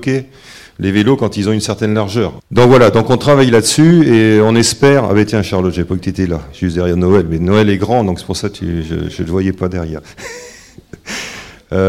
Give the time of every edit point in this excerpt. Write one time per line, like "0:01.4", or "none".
0:02.4